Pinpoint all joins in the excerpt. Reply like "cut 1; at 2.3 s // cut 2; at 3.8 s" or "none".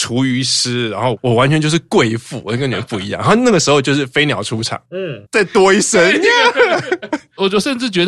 cut 1; at 5.3 s